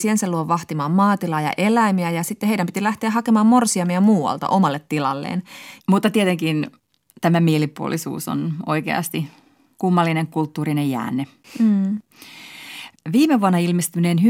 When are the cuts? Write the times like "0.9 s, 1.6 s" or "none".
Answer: 5.8 s

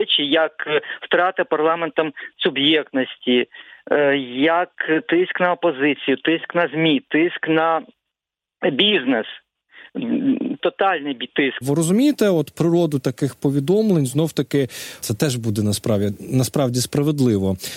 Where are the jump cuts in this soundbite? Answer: 10.6 s, 11.6 s, 15.0 s

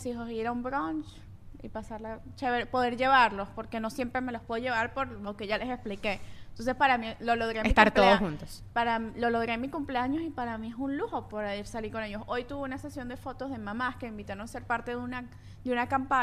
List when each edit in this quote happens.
none

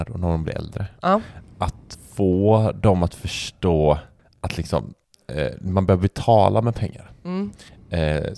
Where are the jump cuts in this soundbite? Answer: none

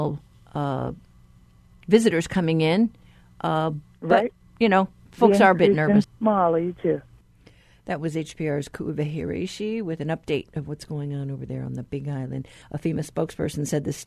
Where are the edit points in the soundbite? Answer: 6.0 s, 12.6 s

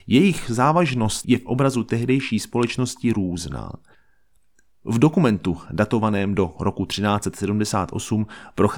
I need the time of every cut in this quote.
none

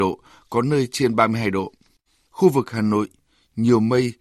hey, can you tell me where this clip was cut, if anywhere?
none

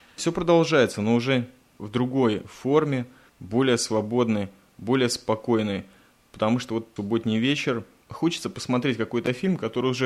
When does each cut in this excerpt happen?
none

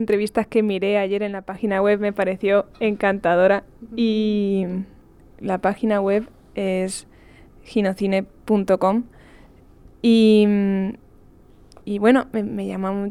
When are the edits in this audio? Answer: 11.8 s

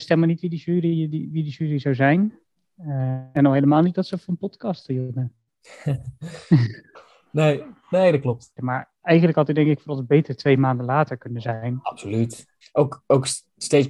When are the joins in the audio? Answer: 8.6 s, 12.6 s

